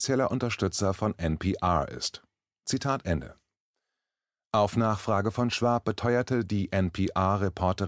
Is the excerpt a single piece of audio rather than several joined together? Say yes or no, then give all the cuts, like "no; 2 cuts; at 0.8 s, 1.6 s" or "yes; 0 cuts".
yes; 0 cuts